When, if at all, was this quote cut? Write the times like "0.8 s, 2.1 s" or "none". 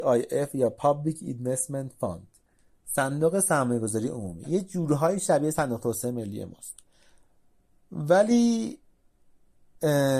none